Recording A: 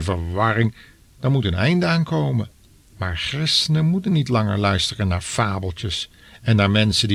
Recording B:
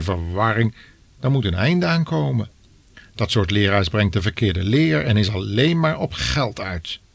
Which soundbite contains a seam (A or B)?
A